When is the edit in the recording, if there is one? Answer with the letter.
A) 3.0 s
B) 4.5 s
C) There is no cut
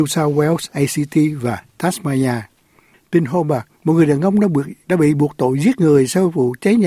C